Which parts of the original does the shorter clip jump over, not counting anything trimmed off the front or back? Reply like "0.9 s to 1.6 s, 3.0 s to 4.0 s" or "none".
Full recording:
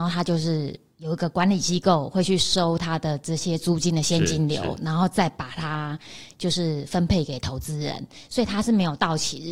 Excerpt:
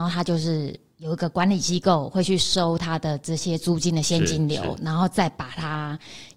none

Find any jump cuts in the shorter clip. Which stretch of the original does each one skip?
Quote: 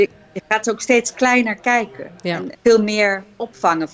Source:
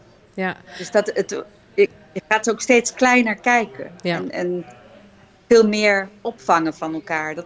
4.3 s to 5.4 s

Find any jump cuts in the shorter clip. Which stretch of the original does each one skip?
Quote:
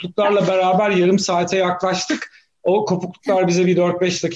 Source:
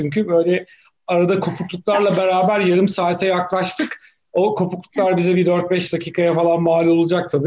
none

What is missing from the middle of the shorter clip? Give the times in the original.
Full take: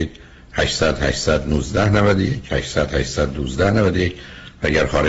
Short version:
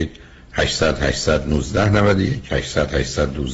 none

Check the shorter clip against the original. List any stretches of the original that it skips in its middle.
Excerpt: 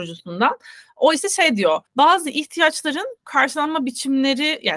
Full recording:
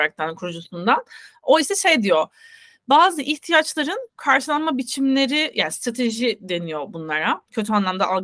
2.3 s to 2.8 s

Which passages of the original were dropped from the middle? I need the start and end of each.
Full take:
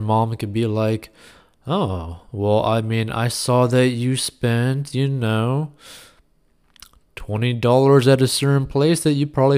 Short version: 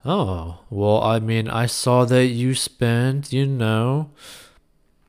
none

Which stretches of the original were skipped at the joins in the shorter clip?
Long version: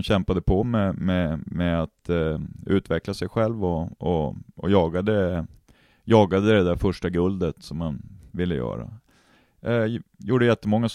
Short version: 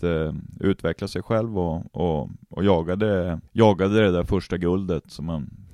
5.5 s to 6.0 s

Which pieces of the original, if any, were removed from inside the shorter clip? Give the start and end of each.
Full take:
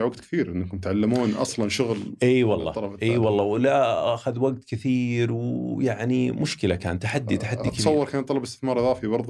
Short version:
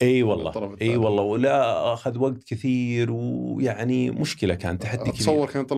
7.0 s to 7.4 s

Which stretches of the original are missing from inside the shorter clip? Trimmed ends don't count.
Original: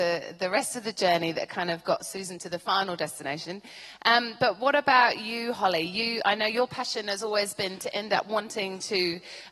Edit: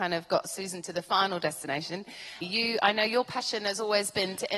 4.0 s to 5.8 s

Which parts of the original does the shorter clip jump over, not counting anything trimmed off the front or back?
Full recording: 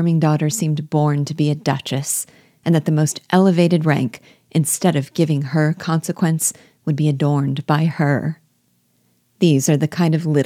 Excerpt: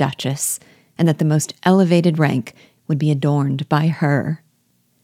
4.4 s to 6.8 s

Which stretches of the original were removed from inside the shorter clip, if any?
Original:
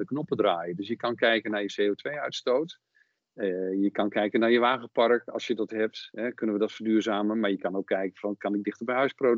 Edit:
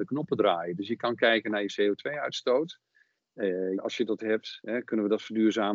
3.8 s to 5.3 s

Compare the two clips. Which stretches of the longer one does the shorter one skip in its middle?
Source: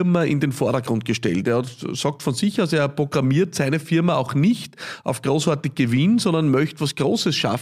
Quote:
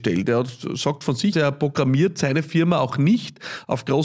2.5 s to 2.7 s

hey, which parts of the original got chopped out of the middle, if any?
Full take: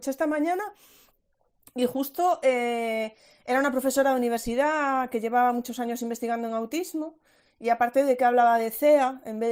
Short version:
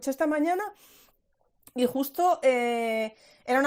none

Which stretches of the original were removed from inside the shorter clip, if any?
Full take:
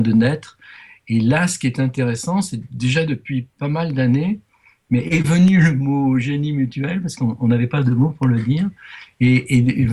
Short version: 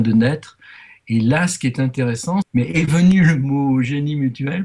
2.4 s to 4.8 s

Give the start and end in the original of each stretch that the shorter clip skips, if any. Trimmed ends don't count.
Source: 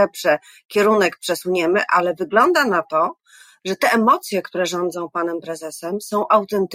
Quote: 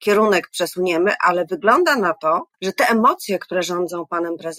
3.2 s to 3.6 s

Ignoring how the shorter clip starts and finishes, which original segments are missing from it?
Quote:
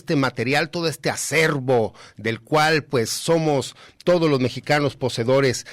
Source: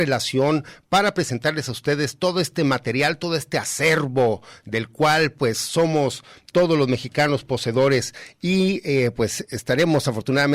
none

